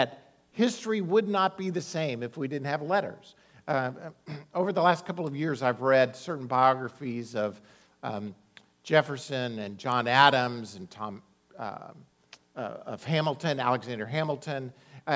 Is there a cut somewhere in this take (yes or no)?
no